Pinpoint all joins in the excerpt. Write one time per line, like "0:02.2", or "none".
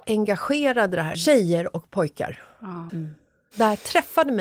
0:01.1
0:02.9